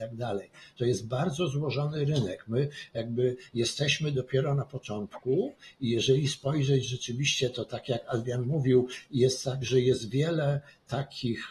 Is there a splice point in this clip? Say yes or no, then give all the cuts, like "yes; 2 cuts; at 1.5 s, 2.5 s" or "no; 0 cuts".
no; 0 cuts